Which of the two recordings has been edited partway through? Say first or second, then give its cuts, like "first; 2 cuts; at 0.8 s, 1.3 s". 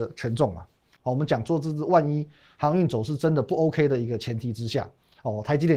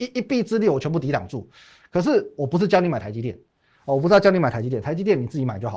first; 1 cut; at 1.0 s